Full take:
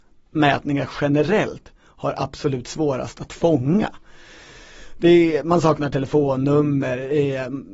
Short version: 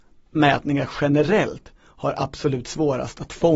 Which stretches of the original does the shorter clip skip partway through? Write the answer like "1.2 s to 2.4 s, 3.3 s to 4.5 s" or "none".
none